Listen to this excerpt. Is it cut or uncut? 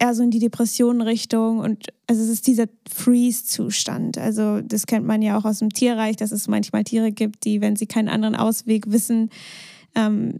uncut